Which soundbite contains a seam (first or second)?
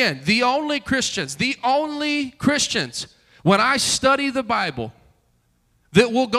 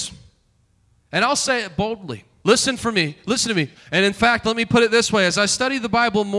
second